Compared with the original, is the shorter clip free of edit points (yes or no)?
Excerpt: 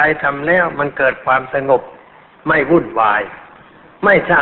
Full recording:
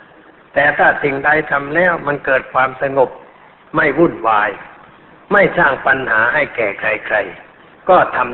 yes